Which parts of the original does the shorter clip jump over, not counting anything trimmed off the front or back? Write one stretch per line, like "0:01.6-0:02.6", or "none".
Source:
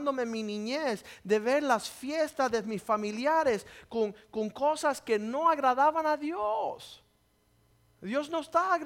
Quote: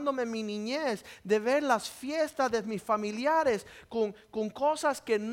none